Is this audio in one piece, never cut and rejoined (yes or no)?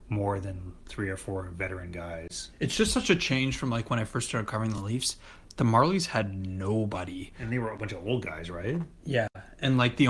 yes